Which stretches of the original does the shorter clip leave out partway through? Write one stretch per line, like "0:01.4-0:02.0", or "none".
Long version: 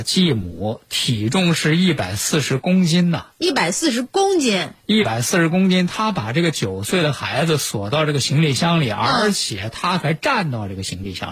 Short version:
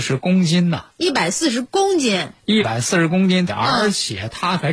0:05.9-0:08.9